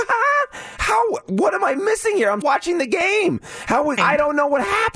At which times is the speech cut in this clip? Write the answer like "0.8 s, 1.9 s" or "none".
2.4 s, 4.0 s

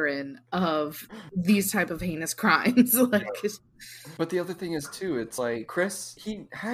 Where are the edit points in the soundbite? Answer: none

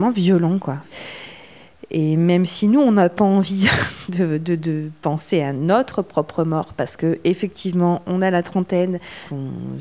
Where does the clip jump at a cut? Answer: none

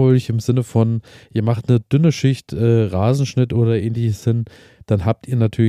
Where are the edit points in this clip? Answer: none

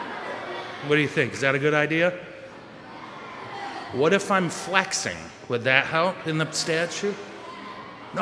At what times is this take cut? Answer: none

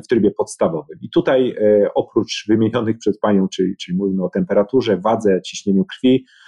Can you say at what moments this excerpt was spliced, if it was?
none

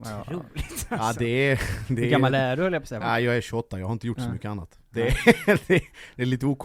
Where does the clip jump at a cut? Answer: 3.0 s

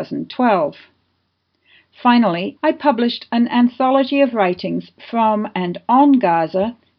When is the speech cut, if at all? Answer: 2.6 s

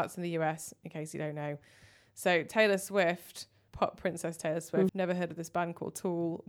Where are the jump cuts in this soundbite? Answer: 3.7 s, 4.9 s

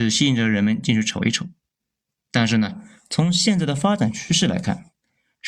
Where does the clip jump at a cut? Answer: none

